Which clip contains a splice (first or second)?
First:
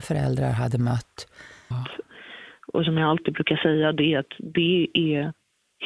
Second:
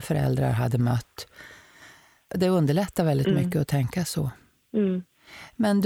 first